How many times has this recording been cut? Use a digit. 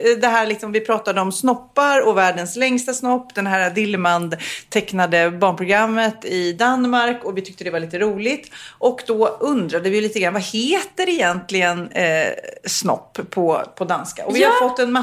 0